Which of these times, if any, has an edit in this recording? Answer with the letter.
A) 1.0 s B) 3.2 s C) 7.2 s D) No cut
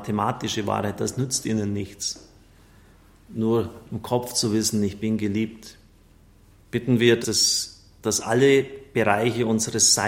C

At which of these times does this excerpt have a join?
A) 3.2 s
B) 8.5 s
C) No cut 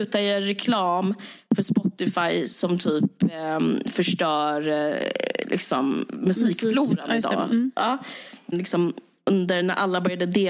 B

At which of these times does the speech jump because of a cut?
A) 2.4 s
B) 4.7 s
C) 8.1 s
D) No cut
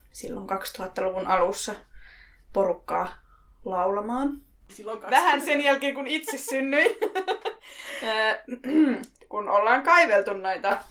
B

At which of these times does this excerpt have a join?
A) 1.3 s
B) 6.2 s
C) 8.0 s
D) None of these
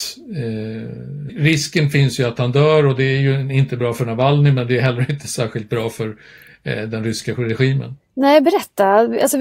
A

